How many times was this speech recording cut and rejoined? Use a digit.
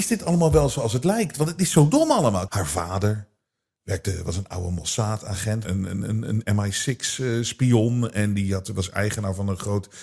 2